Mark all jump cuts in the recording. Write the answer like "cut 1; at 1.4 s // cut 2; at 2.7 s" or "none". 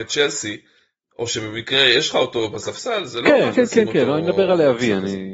cut 1; at 3.5 s